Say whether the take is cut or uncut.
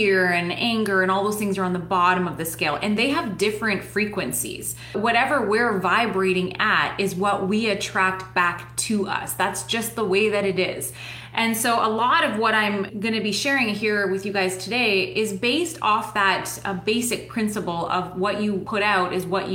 uncut